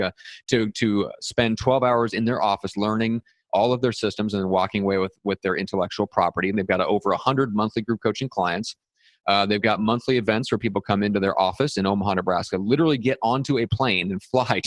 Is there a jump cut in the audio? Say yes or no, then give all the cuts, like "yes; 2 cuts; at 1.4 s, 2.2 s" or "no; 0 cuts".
yes; 1 cut; at 6.5 s